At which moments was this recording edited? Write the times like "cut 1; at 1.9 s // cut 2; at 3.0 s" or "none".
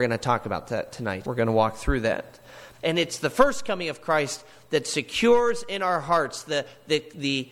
cut 1; at 1.2 s // cut 2; at 2.7 s